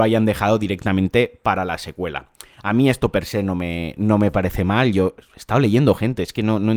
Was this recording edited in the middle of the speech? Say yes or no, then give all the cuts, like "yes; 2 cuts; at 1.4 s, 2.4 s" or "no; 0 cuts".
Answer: no; 0 cuts